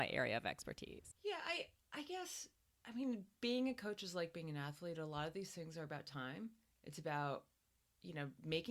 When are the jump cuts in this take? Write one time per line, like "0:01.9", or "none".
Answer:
0:01.1